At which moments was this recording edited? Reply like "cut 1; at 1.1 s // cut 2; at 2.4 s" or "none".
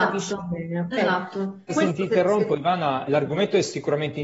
cut 1; at 1.7 s // cut 2; at 3.1 s